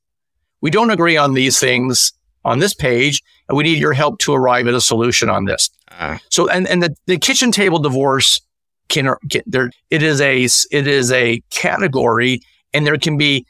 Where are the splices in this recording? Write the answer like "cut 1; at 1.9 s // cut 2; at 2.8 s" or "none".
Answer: cut 1; at 9.7 s